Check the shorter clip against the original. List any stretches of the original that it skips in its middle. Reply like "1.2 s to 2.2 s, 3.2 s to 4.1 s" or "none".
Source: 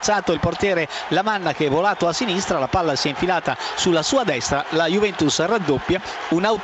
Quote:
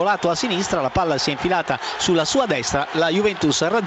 none